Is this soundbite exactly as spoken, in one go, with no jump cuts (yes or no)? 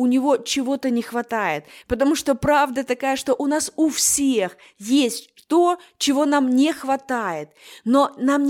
yes